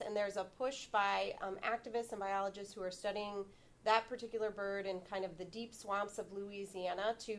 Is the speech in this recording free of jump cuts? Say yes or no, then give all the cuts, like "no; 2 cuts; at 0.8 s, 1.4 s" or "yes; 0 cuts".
yes; 0 cuts